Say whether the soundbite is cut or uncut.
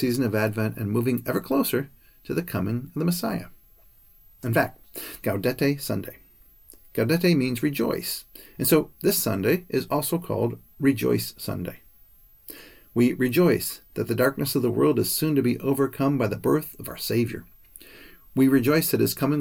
cut